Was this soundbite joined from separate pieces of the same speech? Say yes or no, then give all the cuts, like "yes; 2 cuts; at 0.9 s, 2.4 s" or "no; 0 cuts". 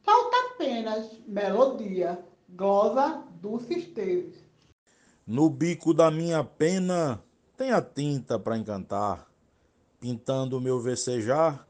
no; 0 cuts